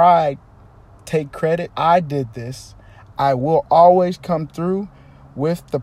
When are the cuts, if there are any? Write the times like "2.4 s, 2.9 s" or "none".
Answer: 1.7 s, 3.1 s